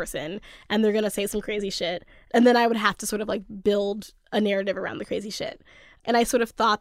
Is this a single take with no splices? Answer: yes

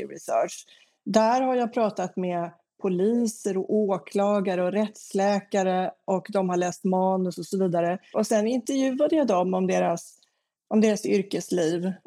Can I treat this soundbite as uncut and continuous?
no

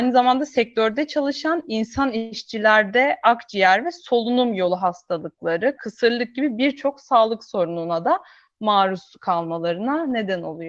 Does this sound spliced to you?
yes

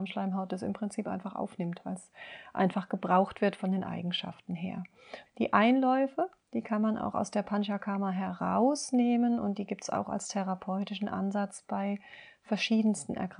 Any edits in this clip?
yes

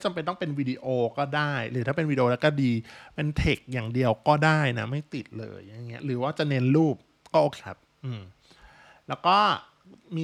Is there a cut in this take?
yes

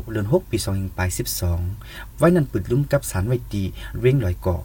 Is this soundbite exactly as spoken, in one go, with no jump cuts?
yes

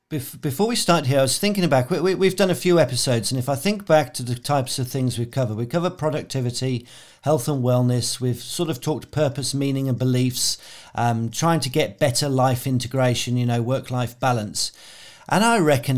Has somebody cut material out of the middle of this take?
yes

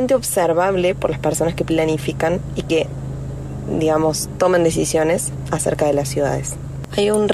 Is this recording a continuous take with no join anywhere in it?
yes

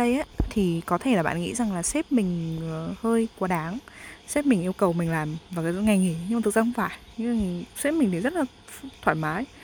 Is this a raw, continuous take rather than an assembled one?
yes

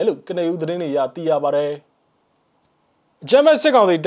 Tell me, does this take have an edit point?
no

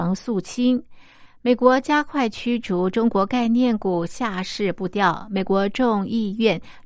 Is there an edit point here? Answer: yes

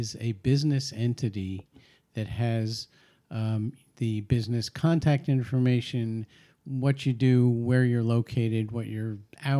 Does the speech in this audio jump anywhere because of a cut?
no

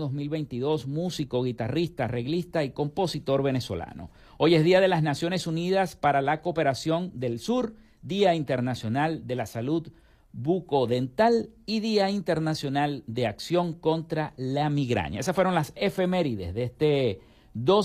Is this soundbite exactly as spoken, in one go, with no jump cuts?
yes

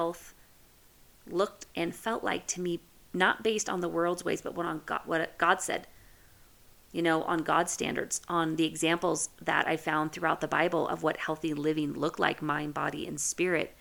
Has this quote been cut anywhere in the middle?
yes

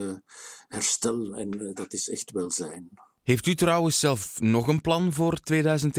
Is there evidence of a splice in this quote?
no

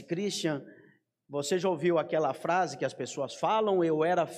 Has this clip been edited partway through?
no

